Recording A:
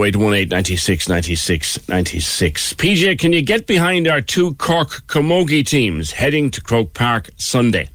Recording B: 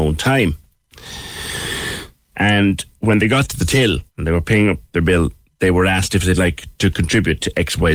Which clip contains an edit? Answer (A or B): B